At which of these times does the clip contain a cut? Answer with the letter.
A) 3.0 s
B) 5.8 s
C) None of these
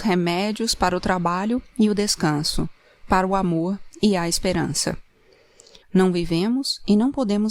B